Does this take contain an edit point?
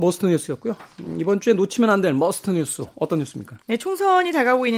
yes; 1 cut; at 3.6 s

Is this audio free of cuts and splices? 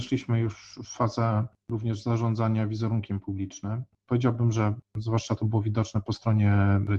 yes; 0 cuts

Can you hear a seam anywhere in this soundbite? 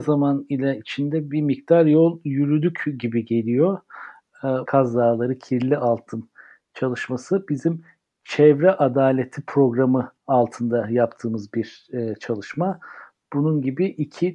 yes; 2 cuts; at 4.7 s, 10.2 s

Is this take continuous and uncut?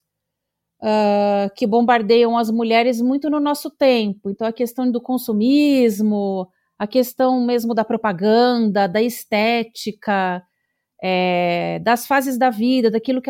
yes; 0 cuts

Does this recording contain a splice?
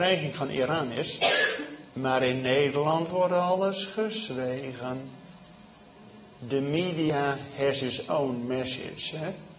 yes; 1 cut; at 1.9 s

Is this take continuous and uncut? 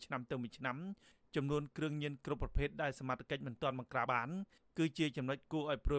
no; 1 cut; at 4.1 s

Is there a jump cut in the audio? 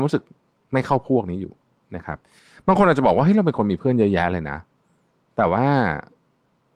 no; 0 cuts

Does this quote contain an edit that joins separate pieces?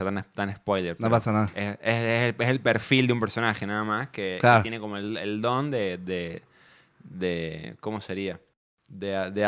no; 0 cuts

